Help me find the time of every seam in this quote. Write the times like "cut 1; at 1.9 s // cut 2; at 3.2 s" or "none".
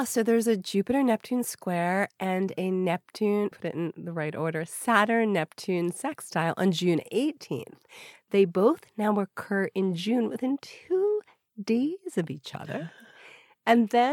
cut 1; at 3.5 s // cut 2; at 8.1 s

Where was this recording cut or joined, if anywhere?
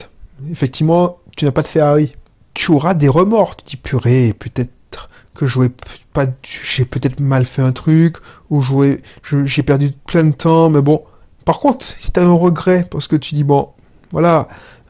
cut 1; at 10.0 s

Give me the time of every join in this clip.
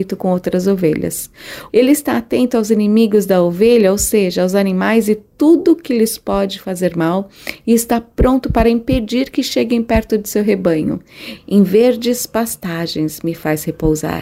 cut 1; at 1.7 s // cut 2; at 11.4 s

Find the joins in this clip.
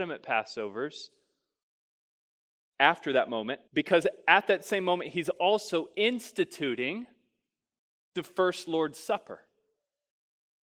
cut 1; at 3.7 s

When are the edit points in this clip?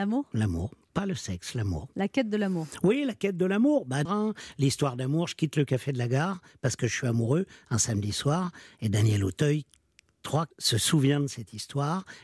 cut 1; at 4.1 s // cut 2; at 10.5 s

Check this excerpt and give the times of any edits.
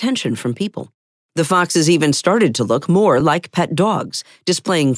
none

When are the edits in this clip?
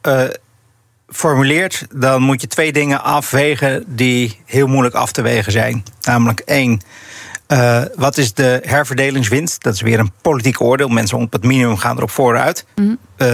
none

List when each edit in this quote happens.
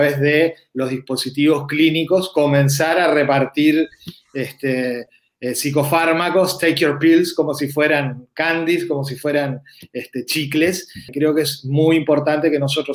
cut 1; at 11.1 s

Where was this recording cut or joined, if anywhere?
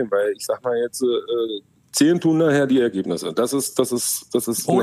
none

